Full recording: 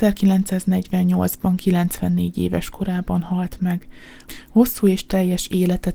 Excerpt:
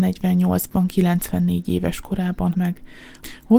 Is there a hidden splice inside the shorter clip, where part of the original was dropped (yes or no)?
yes